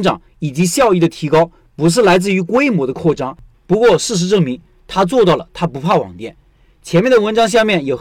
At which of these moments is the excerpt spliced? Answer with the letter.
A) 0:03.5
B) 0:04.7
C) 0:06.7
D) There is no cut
A